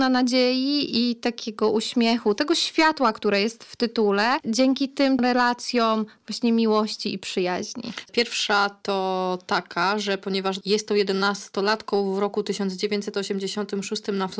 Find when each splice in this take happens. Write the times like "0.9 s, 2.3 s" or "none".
8.1 s